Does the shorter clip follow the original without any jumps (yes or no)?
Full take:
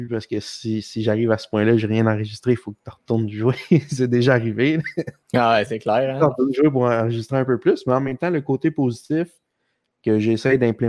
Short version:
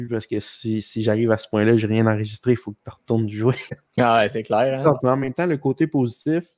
no